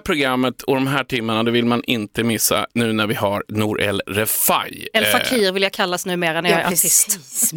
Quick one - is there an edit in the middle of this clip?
no; 0 cuts

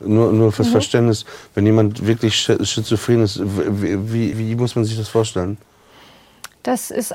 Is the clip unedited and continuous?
no; 1 cut; at 4.3 s

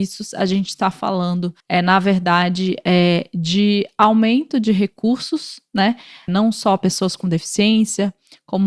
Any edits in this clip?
yes; 2 cuts; at 1.6 s, 6.3 s

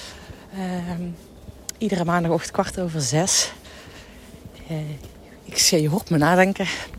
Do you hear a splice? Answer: no; 0 cuts

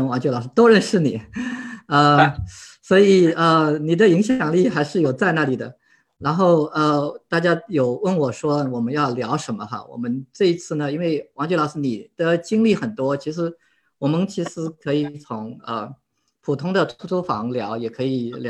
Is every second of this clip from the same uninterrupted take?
yes; 0 cuts

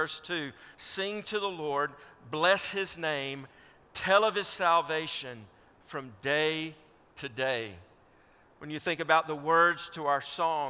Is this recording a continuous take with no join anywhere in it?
yes; 0 cuts

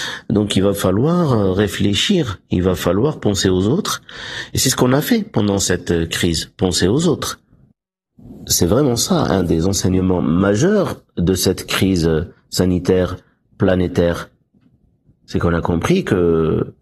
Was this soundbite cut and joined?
no; 0 cuts

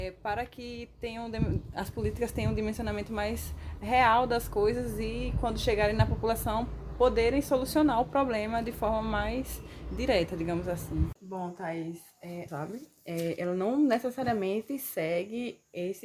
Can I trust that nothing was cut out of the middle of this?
no; 2 cuts; at 11.2 s, 12.5 s

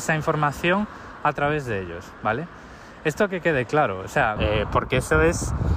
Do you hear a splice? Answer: yes; 1 cut; at 4.4 s

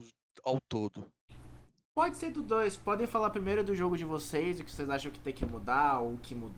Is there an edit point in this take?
no; 0 cuts

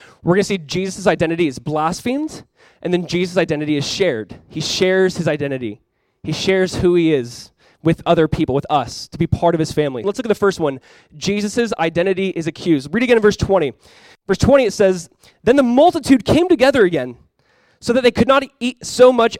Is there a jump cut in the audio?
yes; 1 cut; at 10.0 s

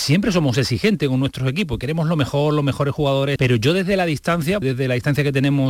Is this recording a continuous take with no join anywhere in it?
no; 2 cuts; at 3.4 s, 4.6 s

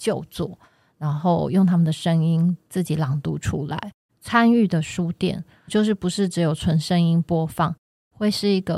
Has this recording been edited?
yes; 2 cuts; at 4.1 s, 5.7 s

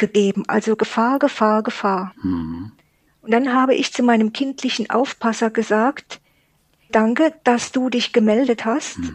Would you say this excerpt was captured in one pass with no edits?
no; 2 cuts; at 3.1 s, 6.9 s

